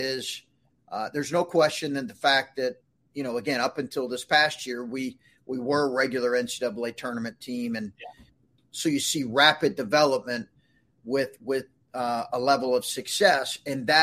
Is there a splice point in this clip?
yes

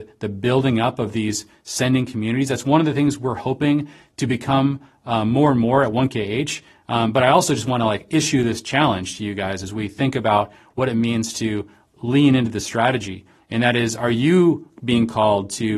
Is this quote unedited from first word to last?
yes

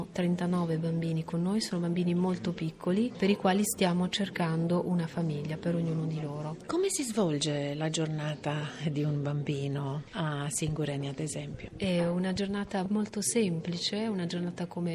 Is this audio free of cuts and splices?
yes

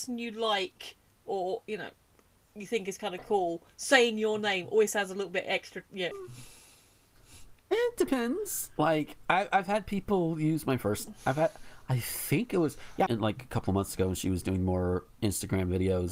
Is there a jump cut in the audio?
yes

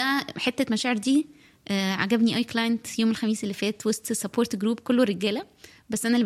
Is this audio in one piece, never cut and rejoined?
yes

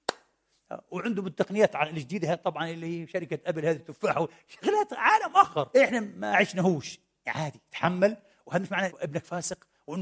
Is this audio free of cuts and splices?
no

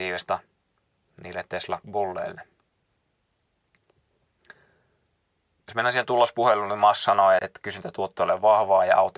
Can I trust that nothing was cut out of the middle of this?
no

